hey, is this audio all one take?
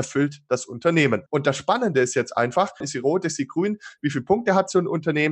no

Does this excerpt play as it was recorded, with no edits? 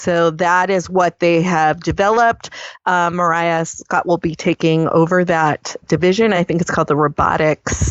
yes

